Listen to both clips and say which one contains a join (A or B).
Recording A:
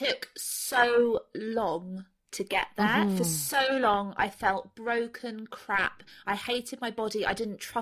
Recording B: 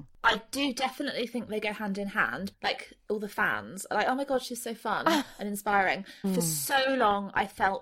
B